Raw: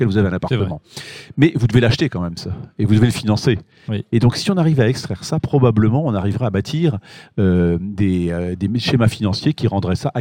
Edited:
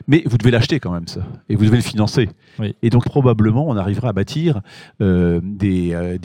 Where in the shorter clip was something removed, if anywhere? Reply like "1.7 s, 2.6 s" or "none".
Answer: 3.0 s